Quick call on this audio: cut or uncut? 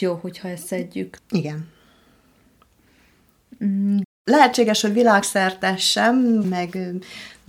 cut